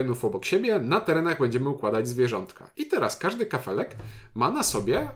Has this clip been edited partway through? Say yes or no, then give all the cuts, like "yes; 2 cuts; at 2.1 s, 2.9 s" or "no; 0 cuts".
no; 0 cuts